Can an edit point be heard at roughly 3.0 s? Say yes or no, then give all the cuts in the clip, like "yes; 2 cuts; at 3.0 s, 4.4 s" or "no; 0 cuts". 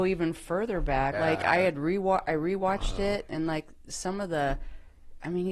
no; 1 cut; at 1.1 s